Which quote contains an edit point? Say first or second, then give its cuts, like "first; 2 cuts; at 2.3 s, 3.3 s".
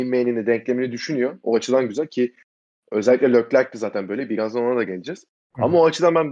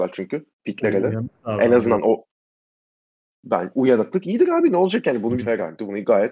second; 1 cut; at 5.4 s